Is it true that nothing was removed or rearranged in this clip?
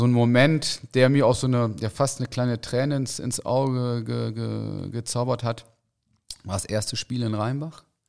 yes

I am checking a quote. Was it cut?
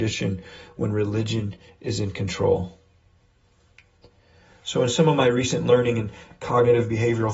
no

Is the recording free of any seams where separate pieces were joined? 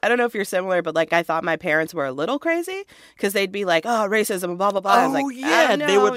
yes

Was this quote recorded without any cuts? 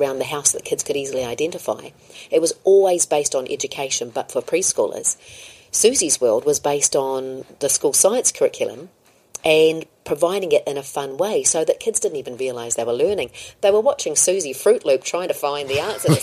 yes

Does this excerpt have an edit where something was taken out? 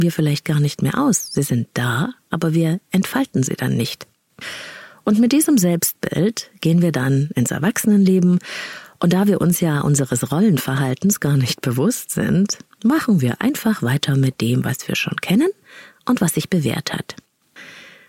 no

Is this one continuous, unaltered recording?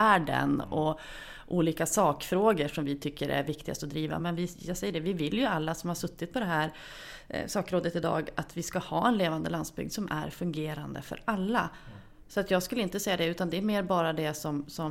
yes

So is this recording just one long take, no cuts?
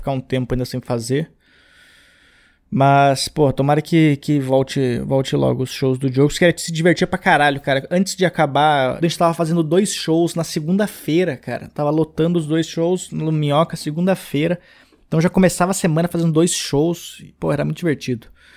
no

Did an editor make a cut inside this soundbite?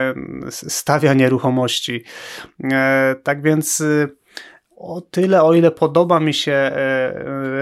no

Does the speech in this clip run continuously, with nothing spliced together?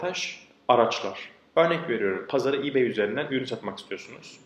no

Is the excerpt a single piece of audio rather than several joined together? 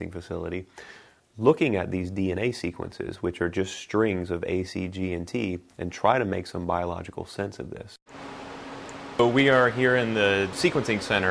yes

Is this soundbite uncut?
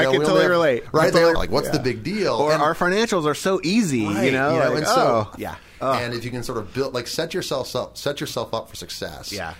no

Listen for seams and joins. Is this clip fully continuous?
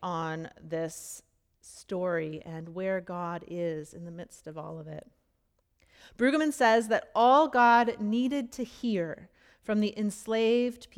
yes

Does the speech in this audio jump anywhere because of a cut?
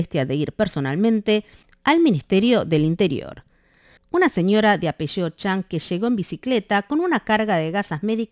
yes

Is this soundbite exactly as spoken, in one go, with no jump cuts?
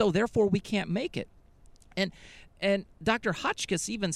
yes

